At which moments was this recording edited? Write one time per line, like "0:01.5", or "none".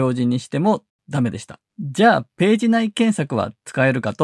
0:01.7

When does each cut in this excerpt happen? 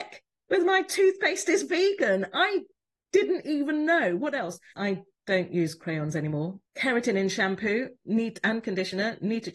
0:04.7
0:06.7

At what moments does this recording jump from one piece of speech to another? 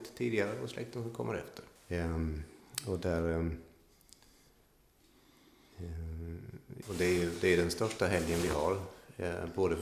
0:01.8
0:06.8

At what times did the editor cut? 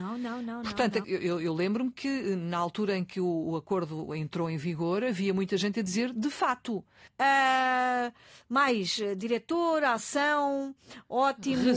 0:01.0
0:07.1

